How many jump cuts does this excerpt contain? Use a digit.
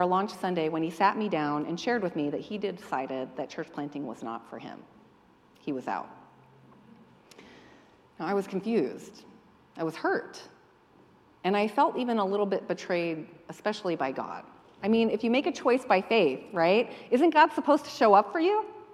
0